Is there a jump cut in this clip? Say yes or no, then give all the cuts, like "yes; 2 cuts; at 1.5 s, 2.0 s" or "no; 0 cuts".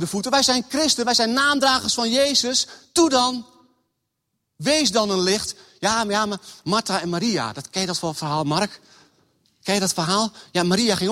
no; 0 cuts